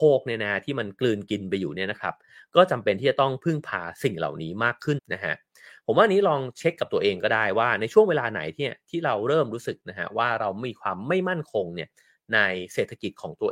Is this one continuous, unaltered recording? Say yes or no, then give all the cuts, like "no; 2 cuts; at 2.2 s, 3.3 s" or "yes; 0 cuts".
no; 1 cut; at 5.0 s